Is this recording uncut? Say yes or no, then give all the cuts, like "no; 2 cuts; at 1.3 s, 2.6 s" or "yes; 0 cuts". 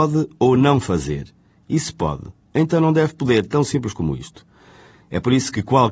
yes; 0 cuts